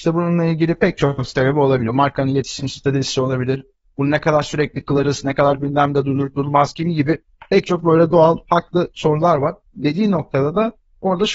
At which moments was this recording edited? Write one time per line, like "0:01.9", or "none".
0:05.2
0:09.7